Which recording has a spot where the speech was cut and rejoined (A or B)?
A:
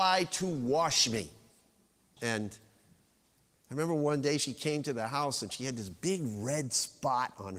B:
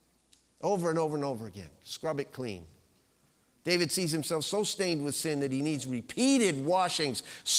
A